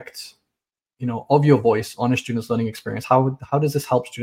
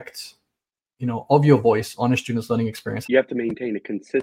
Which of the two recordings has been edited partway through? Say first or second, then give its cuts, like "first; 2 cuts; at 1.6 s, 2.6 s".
second; 1 cut; at 3.0 s